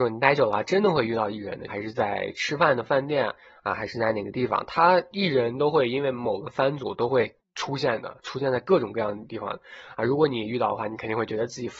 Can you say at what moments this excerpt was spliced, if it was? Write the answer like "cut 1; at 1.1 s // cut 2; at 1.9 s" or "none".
cut 1; at 1.7 s